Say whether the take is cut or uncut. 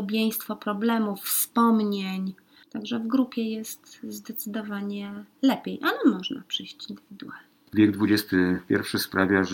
uncut